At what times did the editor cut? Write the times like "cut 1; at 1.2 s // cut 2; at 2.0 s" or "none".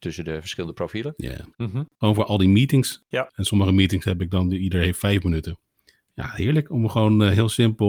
cut 1; at 1.5 s